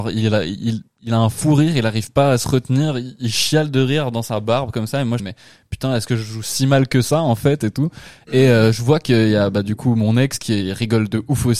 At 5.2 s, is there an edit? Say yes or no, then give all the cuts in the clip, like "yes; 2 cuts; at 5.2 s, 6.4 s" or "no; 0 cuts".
yes; 1 cut; at 5.2 s